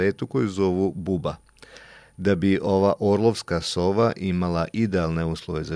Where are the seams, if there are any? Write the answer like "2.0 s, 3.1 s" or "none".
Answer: none